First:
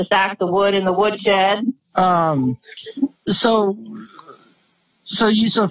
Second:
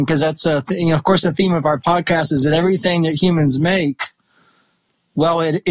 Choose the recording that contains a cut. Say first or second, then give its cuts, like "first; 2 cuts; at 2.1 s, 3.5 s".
first; 2 cuts; at 1.9 s, 3.2 s